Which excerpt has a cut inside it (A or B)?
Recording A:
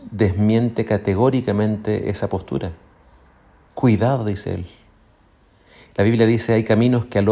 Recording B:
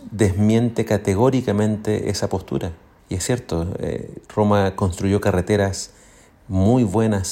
B